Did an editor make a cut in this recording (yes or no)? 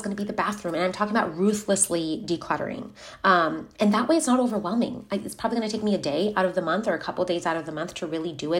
no